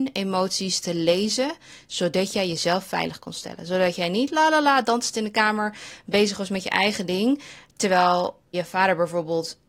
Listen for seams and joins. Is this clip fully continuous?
no; 1 cut; at 8.5 s

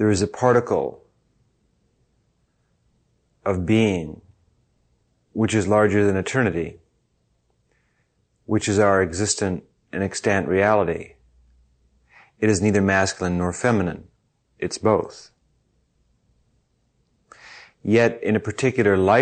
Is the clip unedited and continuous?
yes; 0 cuts

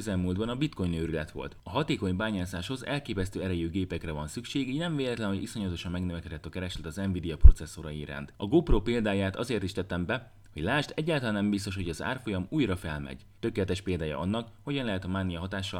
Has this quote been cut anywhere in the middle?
yes; 2 cuts; at 8.4 s, 13.4 s

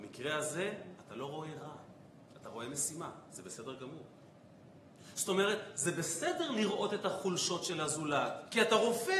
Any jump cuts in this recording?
no; 0 cuts

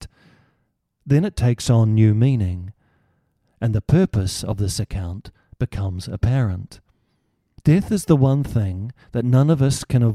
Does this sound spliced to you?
yes; 1 cut; at 7.6 s

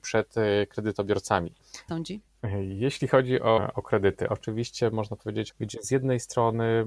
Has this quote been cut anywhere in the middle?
yes; 3 cuts; at 1.9 s, 4.3 s, 5.5 s

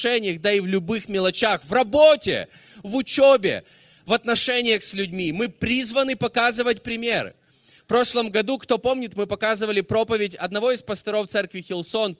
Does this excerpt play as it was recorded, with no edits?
yes; 0 cuts

